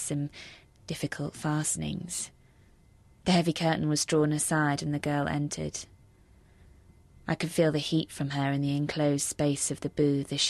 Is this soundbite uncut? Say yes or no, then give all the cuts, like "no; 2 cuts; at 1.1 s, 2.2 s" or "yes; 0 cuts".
yes; 0 cuts